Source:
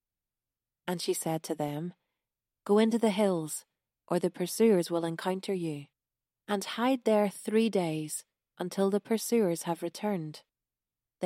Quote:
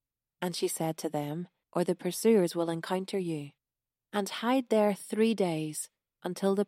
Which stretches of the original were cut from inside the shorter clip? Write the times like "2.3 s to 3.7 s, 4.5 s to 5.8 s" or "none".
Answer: 2.1 s to 4.0 s